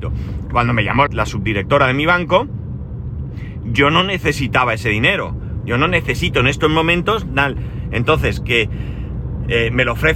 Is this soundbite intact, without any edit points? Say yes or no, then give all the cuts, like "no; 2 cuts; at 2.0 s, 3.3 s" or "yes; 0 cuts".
no; 1 cut; at 1.1 s